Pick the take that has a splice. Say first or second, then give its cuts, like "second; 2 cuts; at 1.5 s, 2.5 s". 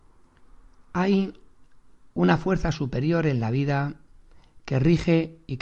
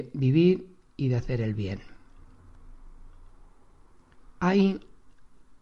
second; 1 cut; at 4.3 s